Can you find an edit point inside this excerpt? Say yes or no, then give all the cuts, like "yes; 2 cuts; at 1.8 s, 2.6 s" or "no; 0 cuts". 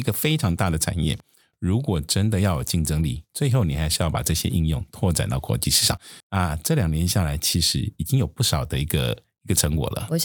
yes; 1 cut; at 6.2 s